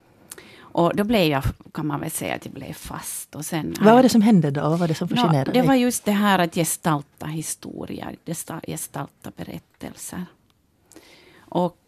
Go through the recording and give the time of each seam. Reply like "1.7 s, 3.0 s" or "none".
none